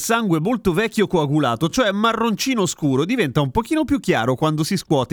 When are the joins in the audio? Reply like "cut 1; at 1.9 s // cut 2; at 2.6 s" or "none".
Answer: none